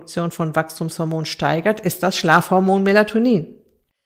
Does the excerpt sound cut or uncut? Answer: uncut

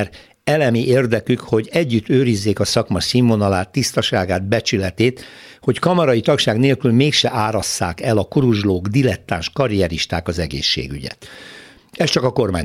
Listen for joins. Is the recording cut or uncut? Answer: uncut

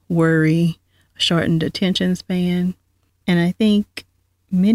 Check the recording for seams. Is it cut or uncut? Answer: cut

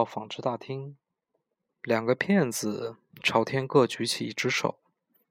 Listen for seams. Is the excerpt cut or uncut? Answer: uncut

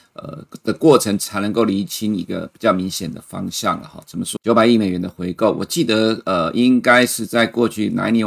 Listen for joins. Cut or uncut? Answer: cut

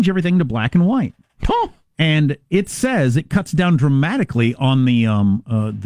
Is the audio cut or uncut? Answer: uncut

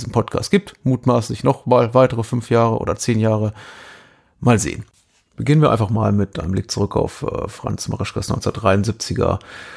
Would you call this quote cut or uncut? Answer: uncut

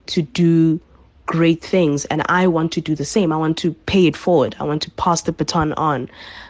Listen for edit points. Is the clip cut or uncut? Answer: uncut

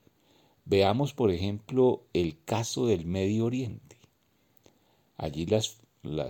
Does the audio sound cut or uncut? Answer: uncut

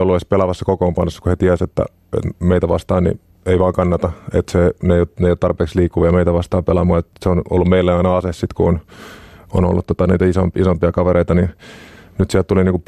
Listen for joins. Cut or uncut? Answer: uncut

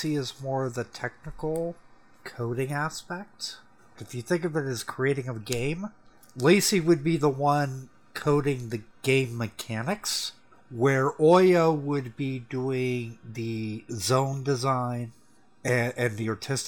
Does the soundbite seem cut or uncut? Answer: cut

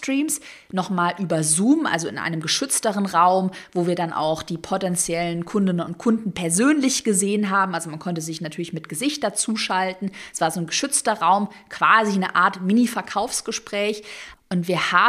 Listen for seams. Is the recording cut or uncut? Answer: uncut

